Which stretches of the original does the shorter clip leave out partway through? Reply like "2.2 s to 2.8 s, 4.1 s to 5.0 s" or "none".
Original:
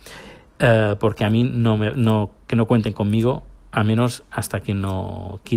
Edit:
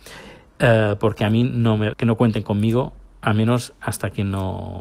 1.9 s to 2.4 s